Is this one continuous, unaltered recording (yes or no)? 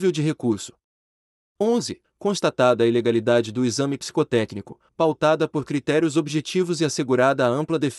no